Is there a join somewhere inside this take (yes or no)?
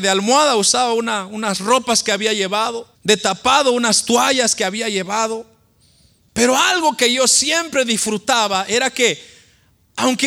yes